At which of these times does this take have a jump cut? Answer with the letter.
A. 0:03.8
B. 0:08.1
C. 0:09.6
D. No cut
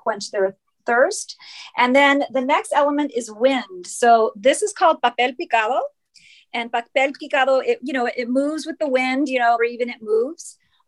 C